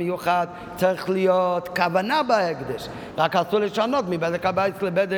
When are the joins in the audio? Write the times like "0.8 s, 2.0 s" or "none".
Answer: 3.1 s

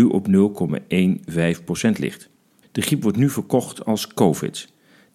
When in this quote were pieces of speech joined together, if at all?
2.6 s

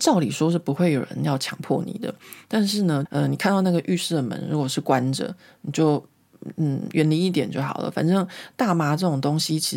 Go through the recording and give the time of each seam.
3.1 s

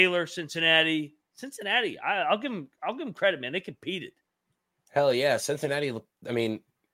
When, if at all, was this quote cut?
none

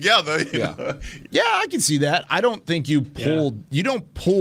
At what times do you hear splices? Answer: 1.2 s

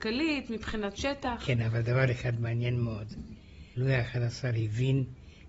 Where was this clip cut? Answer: none

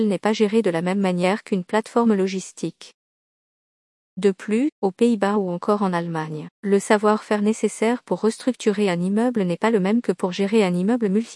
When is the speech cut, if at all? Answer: 4.7 s, 6.5 s

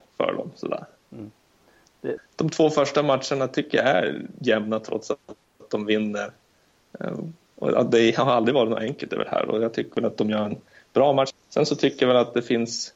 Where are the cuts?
2.2 s, 11.3 s

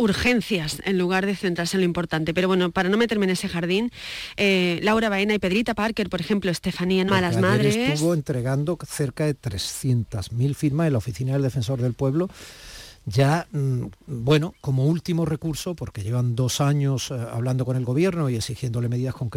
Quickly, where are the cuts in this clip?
7.1 s

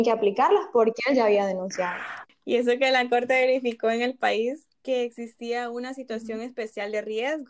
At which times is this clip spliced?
2.3 s, 4.7 s

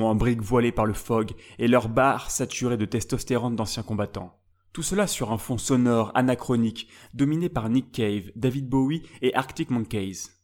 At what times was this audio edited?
none

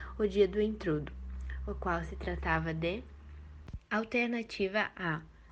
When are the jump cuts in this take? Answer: 3.8 s

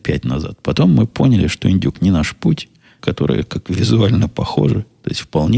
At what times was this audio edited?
3.0 s

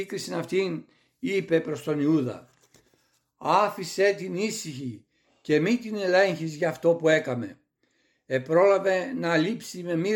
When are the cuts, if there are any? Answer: none

